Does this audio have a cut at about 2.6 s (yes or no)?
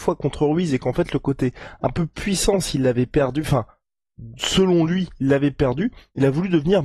no